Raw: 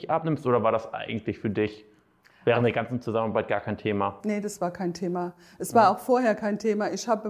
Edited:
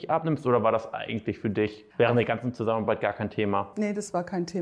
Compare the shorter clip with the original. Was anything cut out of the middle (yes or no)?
yes